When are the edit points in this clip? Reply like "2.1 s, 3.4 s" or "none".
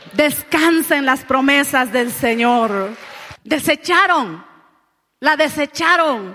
3.3 s